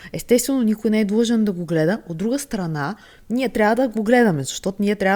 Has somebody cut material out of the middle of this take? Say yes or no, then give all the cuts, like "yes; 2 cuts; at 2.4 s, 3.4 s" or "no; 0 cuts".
no; 0 cuts